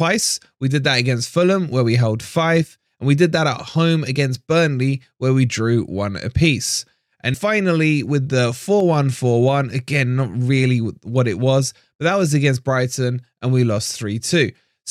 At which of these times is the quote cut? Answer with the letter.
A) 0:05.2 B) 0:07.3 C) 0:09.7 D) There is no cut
B